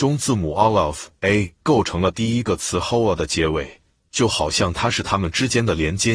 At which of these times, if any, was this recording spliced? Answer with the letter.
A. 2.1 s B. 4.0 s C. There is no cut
B